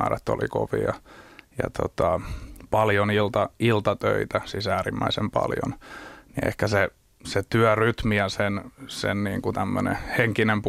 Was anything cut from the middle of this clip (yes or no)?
no